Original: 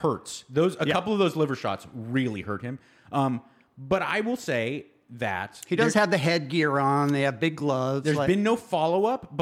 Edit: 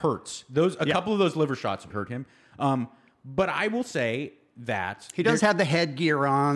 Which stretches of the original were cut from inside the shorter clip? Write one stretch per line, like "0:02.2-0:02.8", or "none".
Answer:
0:01.9-0:02.4